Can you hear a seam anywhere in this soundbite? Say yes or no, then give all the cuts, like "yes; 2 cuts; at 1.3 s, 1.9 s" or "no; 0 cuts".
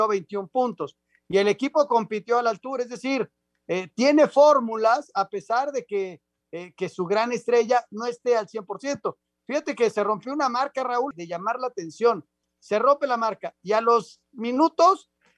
yes; 2 cuts; at 11.1 s, 12.4 s